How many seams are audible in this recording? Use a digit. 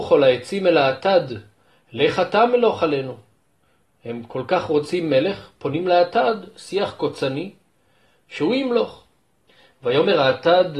0